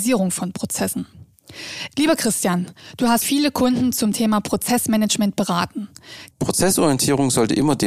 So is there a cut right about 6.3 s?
yes; 2 cuts; at 3.2 s, 6.3 s

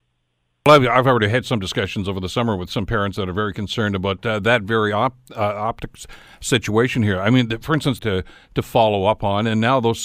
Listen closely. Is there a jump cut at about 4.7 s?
no; 1 cut; at 8.0 s

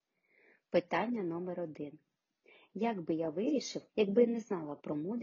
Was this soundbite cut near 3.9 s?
yes; 1 cut; at 3.9 s

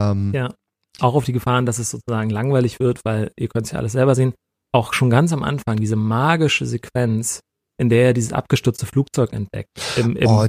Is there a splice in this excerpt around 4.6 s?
no; 1 cut; at 1.0 s

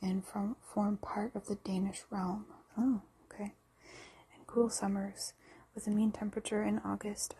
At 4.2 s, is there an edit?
no; 1 cut; at 2.7 s

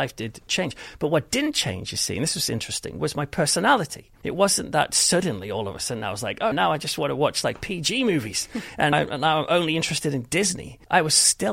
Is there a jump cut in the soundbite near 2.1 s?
no; 2 cuts; at 6.5 s, 8.9 s

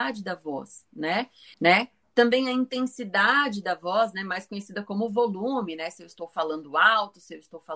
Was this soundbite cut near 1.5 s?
yes; 1 cut; at 1.5 s

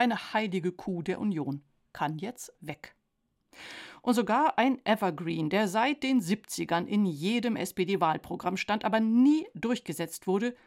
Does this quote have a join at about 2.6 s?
yes; 1 cut; at 2.6 s

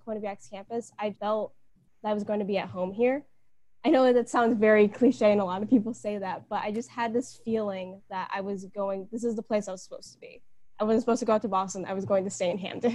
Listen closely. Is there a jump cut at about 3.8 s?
no; 1 cut; at 1.1 s

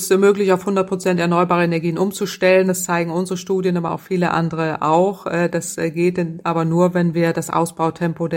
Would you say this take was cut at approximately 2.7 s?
no; 0 cuts

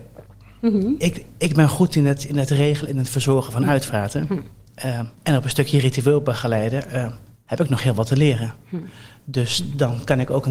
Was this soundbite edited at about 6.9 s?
no; 1 cut; at 5.2 s

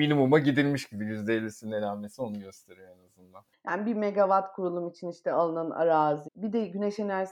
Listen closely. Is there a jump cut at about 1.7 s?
no; 2 cuts; at 3.5 s, 6.3 s

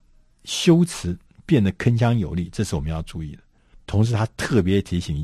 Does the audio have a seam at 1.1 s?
no; 1 cut; at 3.7 s

